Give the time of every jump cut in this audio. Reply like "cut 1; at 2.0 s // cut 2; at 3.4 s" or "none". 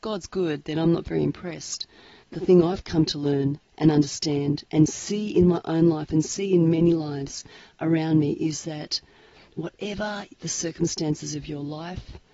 cut 1; at 2.2 s